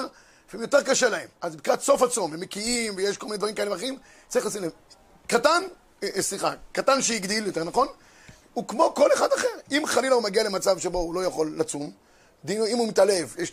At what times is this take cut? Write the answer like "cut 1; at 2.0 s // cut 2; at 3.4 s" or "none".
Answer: cut 1; at 1.4 s